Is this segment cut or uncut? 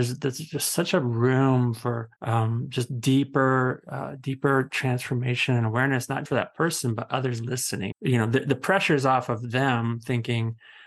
cut